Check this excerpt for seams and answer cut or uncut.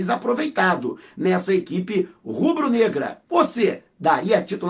cut